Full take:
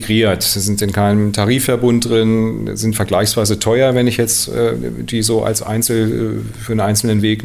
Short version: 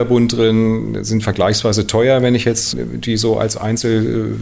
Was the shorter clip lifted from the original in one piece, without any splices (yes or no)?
no